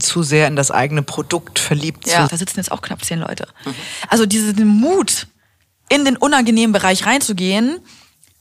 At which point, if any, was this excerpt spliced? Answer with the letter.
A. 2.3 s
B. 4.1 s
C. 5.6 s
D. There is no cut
A